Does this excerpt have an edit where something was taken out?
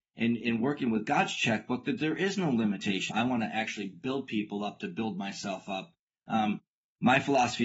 yes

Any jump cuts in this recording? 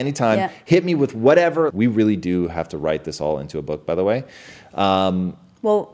yes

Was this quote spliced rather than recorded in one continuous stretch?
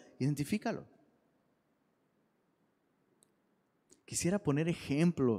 no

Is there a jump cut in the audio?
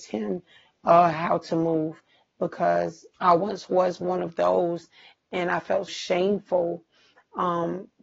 yes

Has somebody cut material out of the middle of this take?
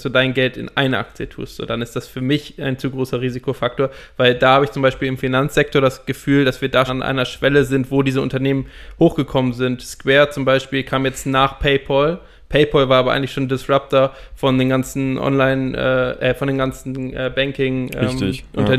yes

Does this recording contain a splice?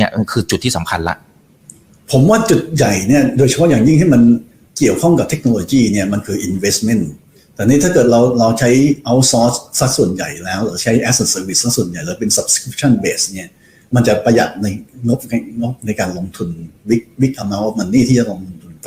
no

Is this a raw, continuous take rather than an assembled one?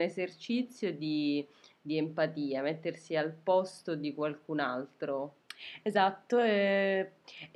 yes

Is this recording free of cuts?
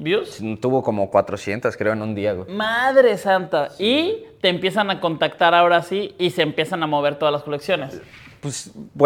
yes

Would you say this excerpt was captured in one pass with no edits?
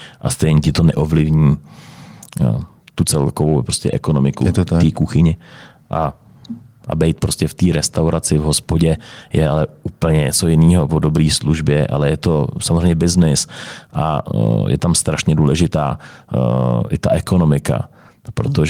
no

